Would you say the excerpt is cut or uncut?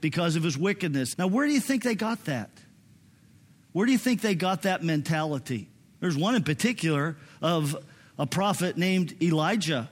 cut